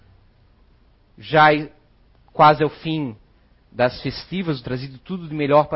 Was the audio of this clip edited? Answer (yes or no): yes